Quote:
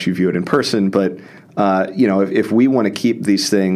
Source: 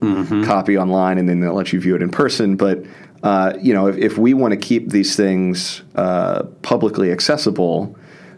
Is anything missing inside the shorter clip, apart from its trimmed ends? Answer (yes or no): no